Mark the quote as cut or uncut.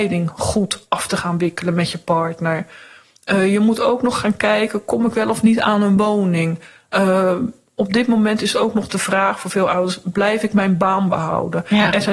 uncut